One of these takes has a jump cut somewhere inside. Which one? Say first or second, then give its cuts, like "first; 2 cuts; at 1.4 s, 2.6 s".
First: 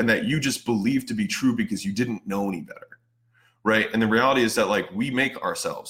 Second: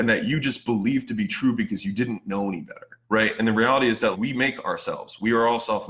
second; 2 cuts; at 3.0 s, 4.1 s